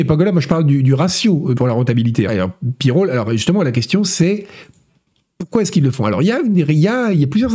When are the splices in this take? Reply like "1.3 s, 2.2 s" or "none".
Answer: 2.3 s